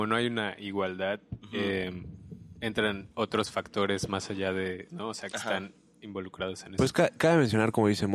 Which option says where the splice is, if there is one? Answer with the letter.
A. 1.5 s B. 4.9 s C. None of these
B